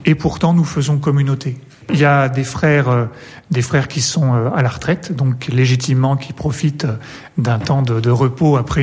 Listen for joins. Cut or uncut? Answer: uncut